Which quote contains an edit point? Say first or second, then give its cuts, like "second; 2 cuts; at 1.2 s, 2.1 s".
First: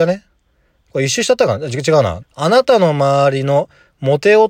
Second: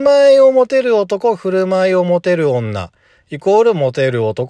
first; 1 cut; at 2.2 s